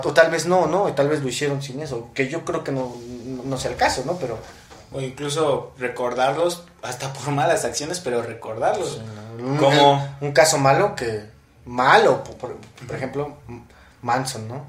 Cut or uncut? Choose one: uncut